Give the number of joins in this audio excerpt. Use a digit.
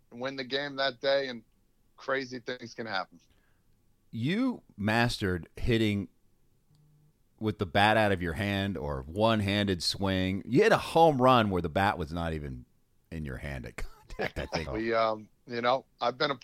1